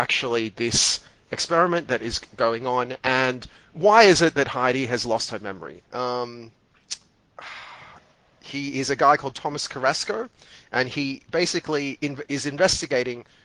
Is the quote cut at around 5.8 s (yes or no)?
yes